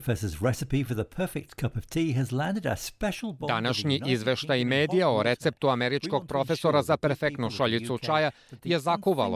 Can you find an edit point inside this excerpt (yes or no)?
no